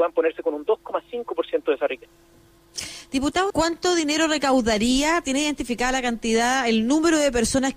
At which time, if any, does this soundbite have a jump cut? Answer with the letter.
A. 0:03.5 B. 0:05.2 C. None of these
A